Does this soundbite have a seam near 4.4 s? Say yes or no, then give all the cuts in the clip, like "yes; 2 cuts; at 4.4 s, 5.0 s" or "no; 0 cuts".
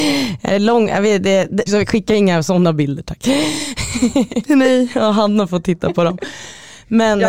yes; 2 cuts; at 1.7 s, 4.4 s